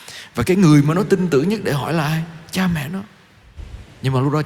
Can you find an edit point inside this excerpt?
no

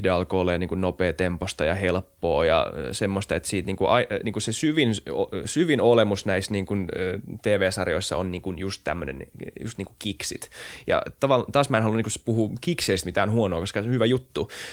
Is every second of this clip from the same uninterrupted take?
yes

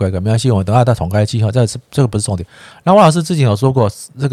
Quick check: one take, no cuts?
yes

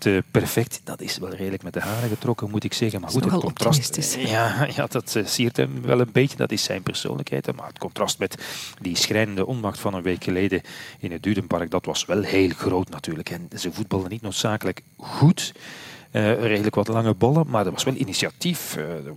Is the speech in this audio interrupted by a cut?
no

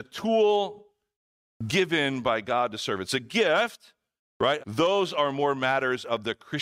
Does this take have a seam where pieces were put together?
yes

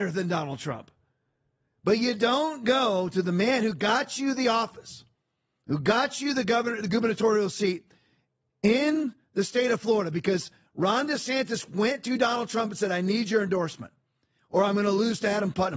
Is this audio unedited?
yes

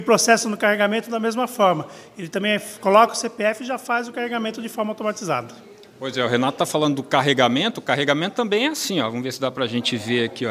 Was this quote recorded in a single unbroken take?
yes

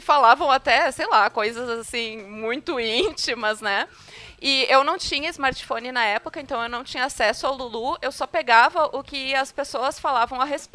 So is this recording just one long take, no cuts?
yes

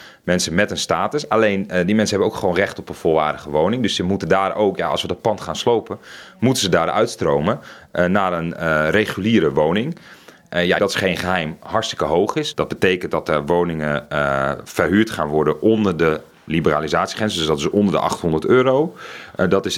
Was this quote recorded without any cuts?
no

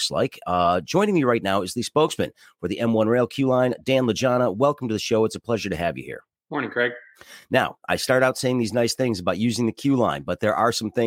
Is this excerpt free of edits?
yes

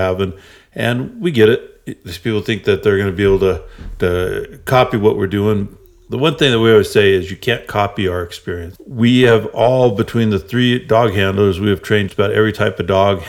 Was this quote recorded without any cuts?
no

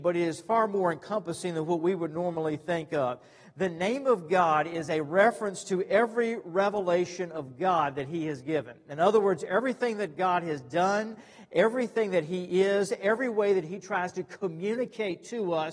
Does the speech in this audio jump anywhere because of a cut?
no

